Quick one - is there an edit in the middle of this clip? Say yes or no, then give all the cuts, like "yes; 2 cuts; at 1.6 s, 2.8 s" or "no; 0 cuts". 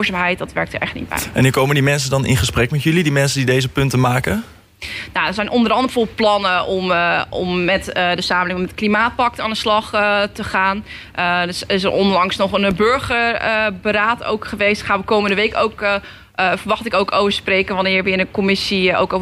no; 0 cuts